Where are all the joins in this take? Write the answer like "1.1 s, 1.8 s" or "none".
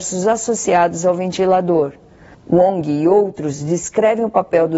2.3 s